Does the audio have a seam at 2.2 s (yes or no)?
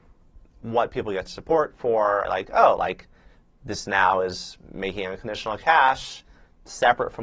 yes